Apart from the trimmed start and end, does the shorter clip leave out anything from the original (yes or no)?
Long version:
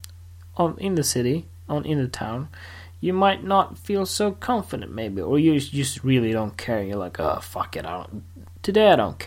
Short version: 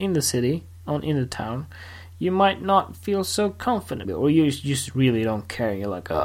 yes